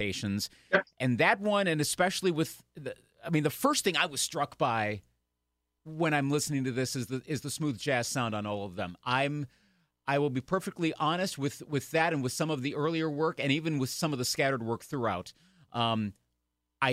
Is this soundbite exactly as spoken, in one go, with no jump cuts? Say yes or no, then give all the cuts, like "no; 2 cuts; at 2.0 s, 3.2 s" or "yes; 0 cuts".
yes; 0 cuts